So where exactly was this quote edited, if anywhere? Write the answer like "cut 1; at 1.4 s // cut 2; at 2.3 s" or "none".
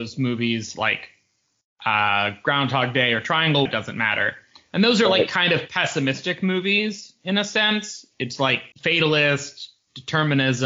cut 1; at 3.7 s // cut 2; at 8.7 s